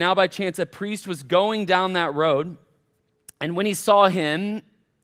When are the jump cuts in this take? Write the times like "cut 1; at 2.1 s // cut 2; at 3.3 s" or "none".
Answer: none